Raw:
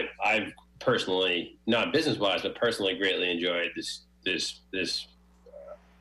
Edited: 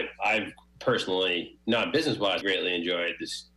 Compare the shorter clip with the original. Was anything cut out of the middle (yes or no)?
yes